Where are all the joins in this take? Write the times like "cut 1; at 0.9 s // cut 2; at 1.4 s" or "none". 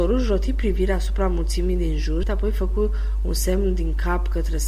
cut 1; at 2.2 s